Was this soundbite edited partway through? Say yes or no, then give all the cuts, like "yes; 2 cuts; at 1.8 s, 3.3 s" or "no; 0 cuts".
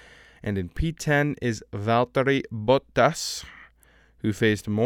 no; 0 cuts